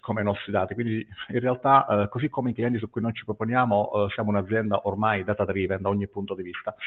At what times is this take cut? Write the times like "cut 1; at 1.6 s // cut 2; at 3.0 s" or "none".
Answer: none